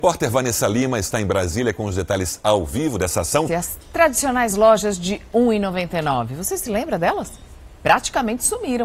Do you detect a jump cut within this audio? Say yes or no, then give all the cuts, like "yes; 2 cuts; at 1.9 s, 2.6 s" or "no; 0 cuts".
yes; 1 cut; at 3.5 s